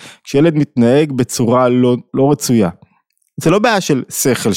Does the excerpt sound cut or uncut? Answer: cut